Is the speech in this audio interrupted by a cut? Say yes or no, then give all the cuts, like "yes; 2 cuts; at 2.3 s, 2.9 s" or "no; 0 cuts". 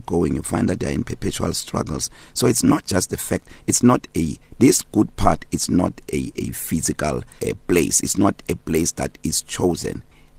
yes; 2 cuts; at 6.0 s, 7.4 s